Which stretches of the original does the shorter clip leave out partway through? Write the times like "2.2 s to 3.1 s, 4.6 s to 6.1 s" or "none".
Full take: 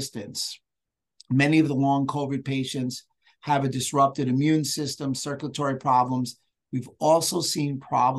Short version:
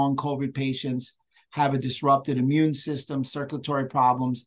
none